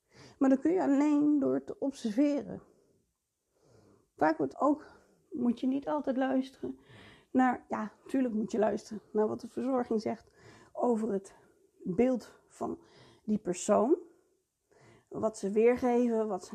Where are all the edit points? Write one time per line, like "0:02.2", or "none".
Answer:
0:04.5